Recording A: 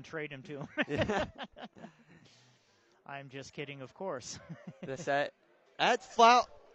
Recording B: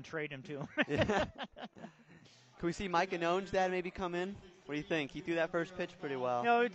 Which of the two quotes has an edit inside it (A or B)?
B